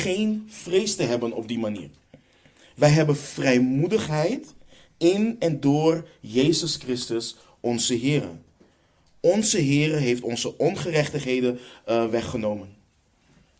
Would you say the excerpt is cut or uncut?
uncut